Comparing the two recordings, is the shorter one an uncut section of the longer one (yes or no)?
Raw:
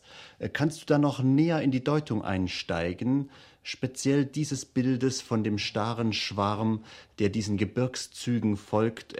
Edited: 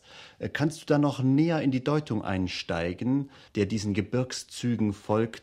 no